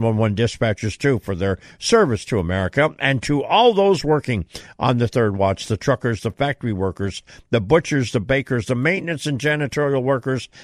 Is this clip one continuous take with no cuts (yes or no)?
no